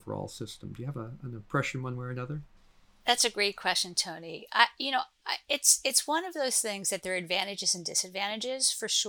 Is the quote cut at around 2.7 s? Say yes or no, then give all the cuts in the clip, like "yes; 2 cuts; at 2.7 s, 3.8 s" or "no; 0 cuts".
no; 0 cuts